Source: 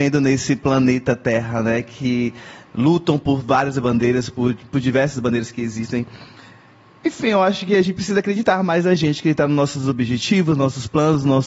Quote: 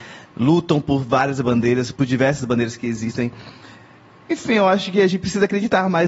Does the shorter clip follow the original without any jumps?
no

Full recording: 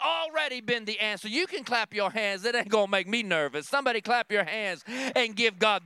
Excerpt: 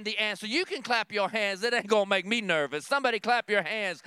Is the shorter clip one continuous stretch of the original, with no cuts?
yes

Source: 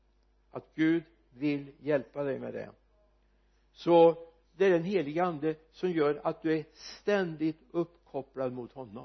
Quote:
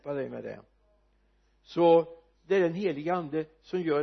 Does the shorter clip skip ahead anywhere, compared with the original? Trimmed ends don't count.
no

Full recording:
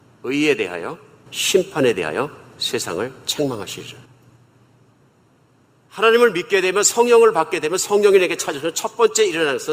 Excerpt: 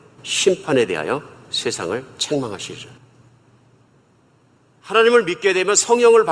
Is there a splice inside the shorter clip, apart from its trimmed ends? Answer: no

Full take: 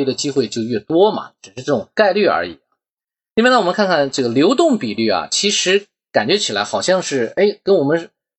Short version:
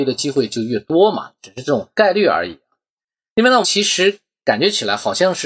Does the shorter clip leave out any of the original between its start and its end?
yes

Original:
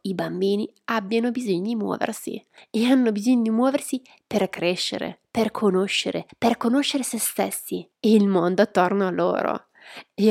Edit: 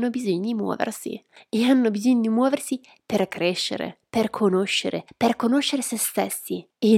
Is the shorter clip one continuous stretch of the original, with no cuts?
yes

